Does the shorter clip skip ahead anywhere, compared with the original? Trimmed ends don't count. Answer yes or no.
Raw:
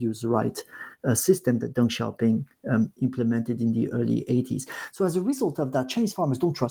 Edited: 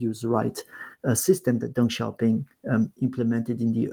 no